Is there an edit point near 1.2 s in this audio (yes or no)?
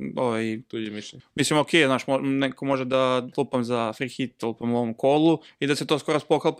yes